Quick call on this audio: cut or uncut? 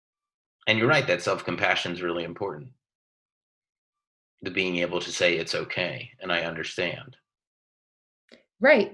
uncut